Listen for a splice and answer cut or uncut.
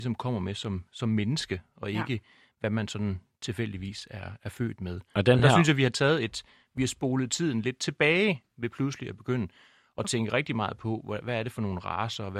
uncut